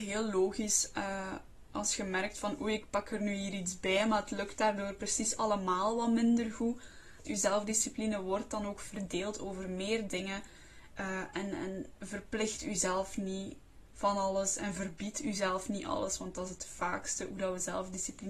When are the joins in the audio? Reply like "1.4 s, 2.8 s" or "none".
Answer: 7.3 s, 10.9 s